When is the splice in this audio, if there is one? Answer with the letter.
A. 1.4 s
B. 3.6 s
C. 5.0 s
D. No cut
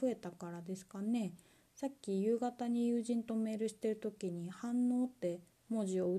D